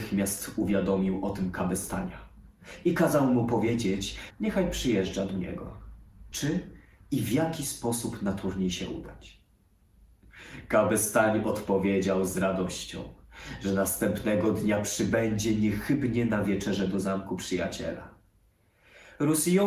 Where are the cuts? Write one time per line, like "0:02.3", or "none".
0:04.3
0:06.3

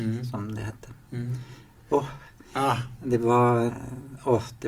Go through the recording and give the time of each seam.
0:01.8
0:03.7

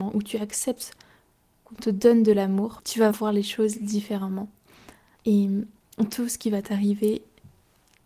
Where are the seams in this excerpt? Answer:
0:03.1
0:05.1

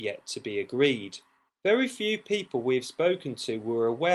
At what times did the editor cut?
0:01.5

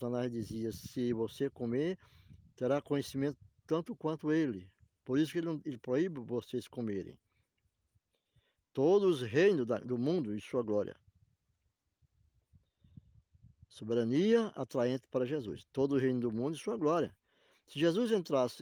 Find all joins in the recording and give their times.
none

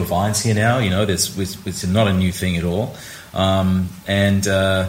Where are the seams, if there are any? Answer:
none

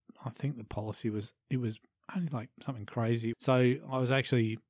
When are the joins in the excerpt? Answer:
0:03.3

